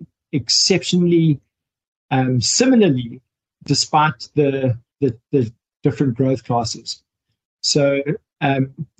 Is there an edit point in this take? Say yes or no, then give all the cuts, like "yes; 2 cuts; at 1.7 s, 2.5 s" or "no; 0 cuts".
yes; 1 cut; at 4.9 s